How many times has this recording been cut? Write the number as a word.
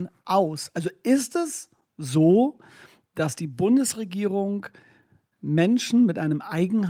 zero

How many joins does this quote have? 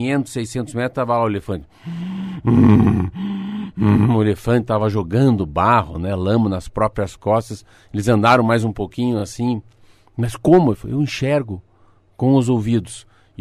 zero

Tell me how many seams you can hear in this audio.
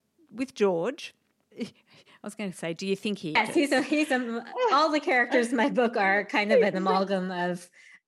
one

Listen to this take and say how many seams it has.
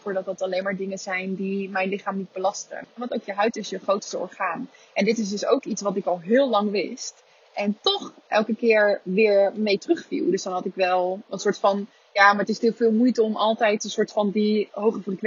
one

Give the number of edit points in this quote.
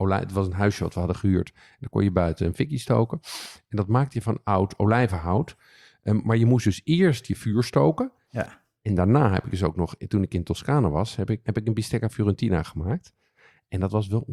two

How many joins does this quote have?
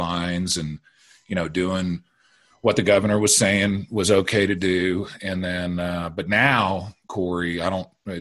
zero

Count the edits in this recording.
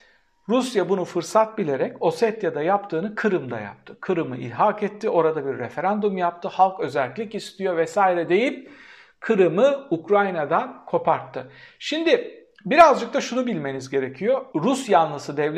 one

